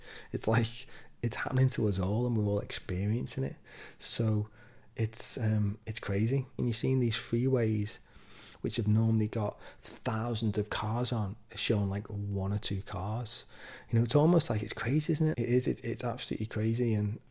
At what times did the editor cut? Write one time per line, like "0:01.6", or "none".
0:06.6
0:15.3